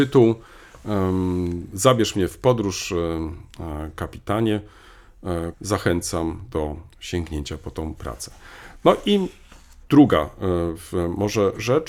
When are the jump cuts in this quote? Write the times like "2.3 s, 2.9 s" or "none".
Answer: 5.5 s